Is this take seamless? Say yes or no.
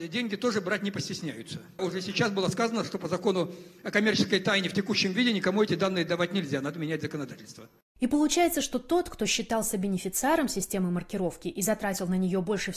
yes